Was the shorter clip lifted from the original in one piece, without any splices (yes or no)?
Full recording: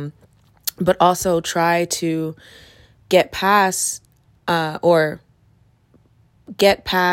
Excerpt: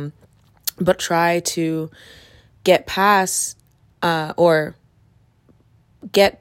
no